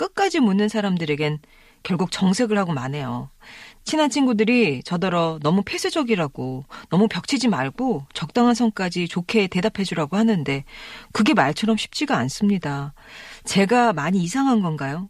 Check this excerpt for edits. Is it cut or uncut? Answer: uncut